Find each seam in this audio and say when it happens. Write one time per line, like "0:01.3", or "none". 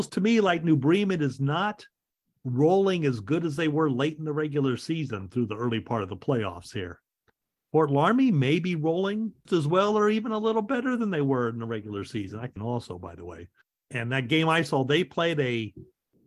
0:09.5
0:12.6